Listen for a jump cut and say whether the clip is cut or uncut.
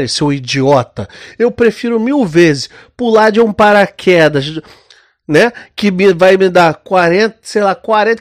uncut